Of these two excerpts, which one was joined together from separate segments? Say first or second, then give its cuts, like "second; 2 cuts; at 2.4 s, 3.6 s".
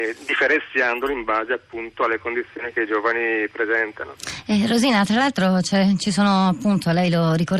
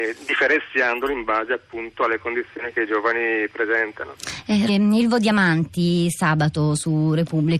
second; 1 cut; at 4.7 s